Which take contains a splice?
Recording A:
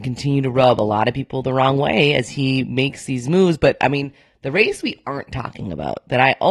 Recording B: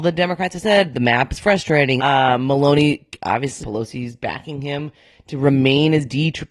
B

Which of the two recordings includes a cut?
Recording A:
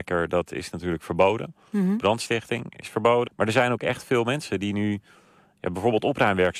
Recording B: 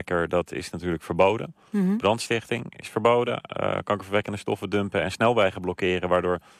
A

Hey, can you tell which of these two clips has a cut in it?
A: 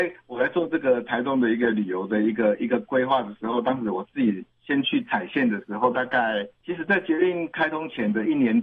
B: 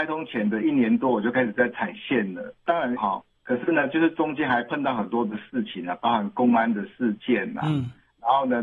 B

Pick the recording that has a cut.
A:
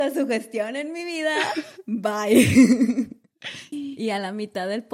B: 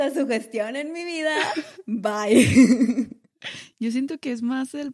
A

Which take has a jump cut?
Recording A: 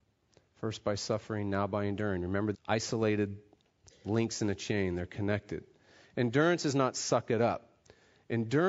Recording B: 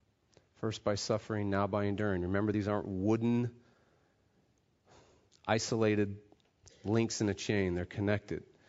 A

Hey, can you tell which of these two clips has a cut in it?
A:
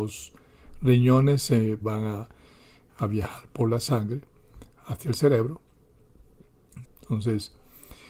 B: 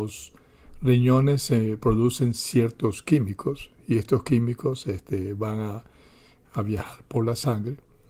A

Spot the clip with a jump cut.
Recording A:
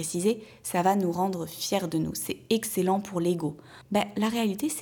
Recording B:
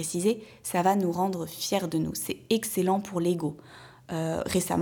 A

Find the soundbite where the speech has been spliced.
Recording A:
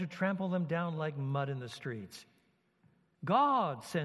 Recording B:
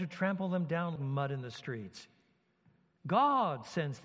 B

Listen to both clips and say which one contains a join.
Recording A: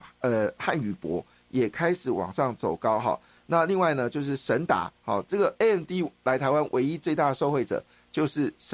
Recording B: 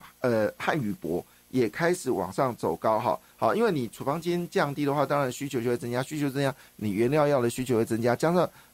B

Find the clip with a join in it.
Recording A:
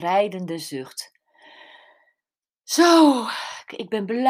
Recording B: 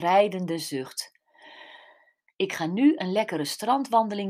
B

